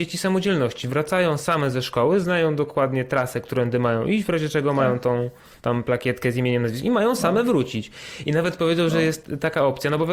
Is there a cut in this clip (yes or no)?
no